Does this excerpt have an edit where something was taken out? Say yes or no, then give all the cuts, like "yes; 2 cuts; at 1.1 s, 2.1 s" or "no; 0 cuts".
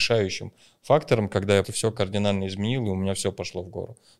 yes; 1 cut; at 1.6 s